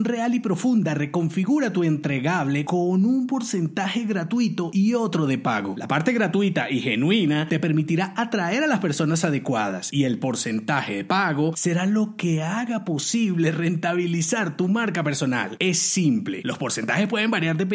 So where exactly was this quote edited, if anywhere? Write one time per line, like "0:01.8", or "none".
none